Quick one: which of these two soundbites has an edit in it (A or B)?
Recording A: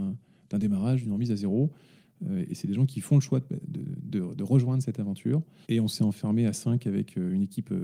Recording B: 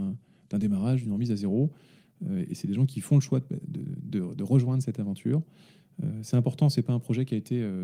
A